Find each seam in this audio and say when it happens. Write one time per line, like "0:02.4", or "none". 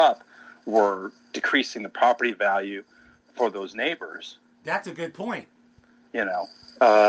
none